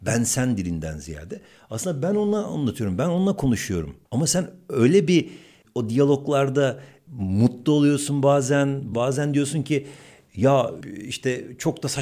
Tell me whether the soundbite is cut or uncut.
cut